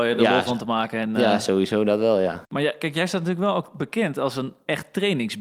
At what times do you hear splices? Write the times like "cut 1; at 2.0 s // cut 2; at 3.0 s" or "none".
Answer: cut 1; at 2.5 s